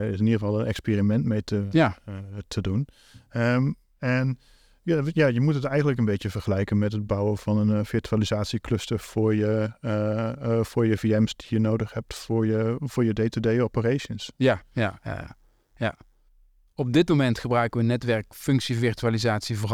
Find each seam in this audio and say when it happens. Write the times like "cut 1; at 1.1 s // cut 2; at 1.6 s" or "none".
none